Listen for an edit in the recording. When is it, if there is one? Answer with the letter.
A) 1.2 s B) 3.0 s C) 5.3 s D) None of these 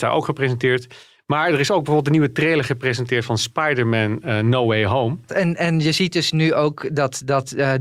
C